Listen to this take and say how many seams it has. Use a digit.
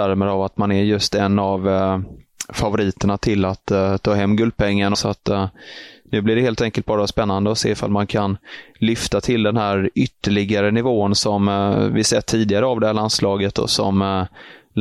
1